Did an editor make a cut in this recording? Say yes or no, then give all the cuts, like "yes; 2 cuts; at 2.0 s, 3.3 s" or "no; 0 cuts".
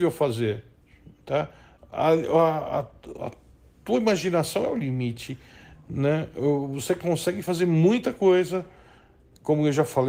no; 0 cuts